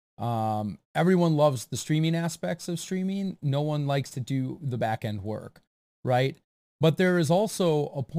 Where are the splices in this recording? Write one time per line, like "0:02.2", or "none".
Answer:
none